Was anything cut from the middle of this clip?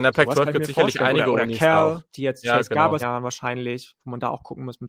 yes; 1 cut; at 3.0 s

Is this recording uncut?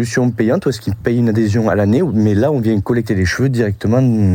yes; 0 cuts

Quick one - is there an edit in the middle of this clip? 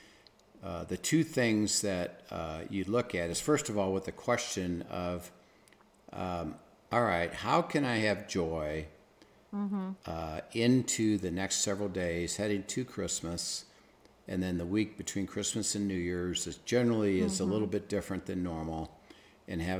no; 0 cuts

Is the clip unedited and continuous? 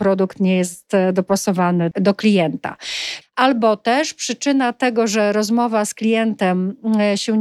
no; 2 cuts; at 1.9 s, 3.2 s

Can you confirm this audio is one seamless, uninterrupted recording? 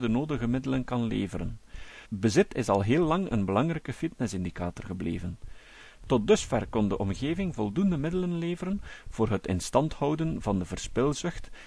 no; 1 cut; at 2.0 s

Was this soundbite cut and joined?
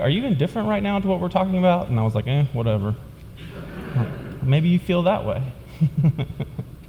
no; 0 cuts

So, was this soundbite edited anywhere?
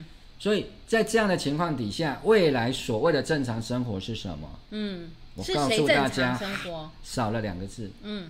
no; 0 cuts

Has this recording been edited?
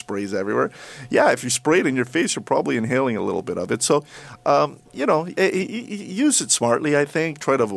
no; 0 cuts

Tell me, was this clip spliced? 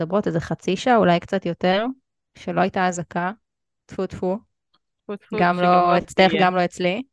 no; 0 cuts

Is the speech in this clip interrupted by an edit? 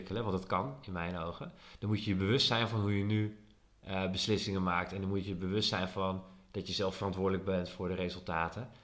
no; 0 cuts

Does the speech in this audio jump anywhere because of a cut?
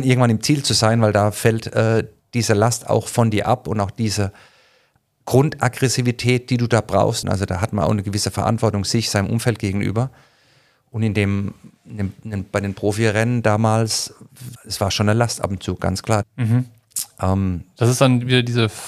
yes; 3 cuts; at 7.2 s, 14.6 s, 16.2 s

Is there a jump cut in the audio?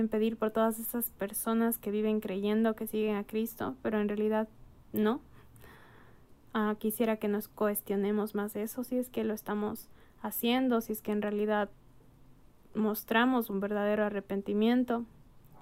no; 0 cuts

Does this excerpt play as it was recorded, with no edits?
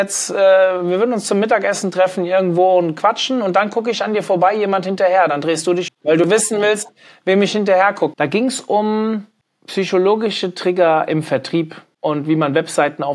no; 2 cuts; at 5.9 s, 8.1 s

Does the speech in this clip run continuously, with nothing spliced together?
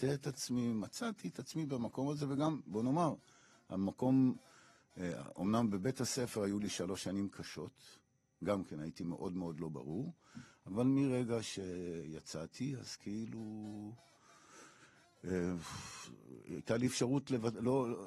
no; 1 cut; at 2.7 s

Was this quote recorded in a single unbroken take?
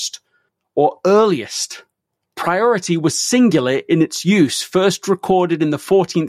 yes; 0 cuts

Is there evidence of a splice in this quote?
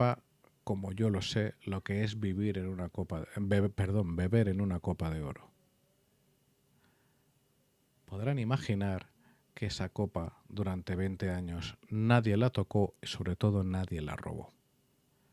no; 0 cuts

